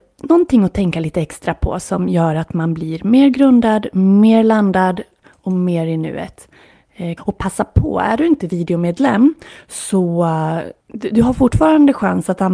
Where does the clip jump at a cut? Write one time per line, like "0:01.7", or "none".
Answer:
0:07.2
0:10.8